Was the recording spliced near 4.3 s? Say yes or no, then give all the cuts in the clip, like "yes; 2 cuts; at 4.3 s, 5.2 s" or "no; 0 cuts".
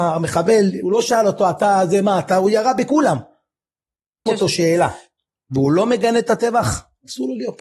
yes; 1 cut; at 4.3 s